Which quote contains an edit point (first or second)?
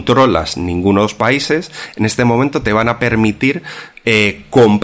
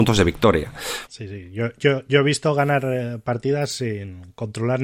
second